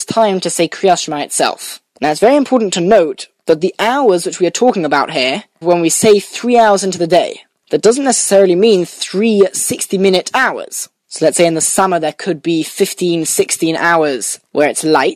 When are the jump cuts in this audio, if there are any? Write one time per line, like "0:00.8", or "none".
0:05.6
0:11.0